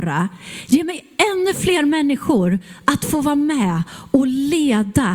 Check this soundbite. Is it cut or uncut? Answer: uncut